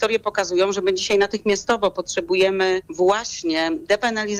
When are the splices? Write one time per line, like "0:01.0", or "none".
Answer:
0:02.9